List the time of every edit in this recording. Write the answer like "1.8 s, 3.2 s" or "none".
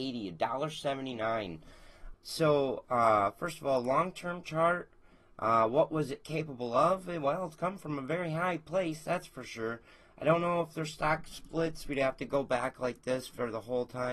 2.1 s